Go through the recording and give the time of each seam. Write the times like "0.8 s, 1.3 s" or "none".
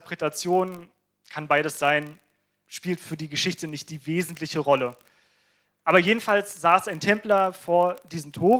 none